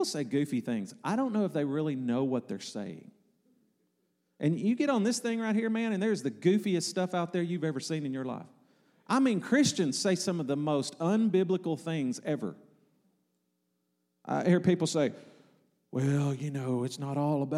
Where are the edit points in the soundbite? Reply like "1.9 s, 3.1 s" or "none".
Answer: none